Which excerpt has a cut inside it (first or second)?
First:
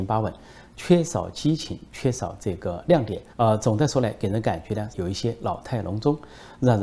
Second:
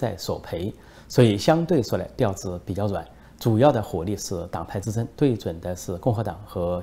first